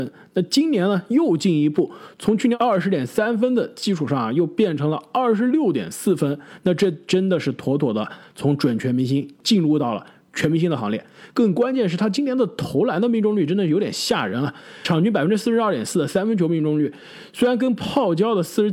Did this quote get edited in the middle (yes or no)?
no